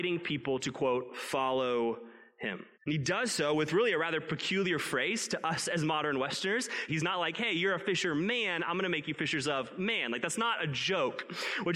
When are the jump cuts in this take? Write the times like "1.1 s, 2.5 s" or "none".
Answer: 2.7 s, 6.9 s